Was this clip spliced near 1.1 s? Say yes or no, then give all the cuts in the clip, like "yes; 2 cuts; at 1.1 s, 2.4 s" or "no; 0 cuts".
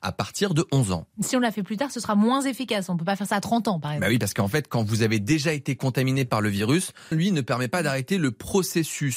no; 1 cut; at 7.1 s